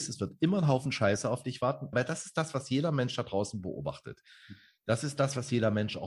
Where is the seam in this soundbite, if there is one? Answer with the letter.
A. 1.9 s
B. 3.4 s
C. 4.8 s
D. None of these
A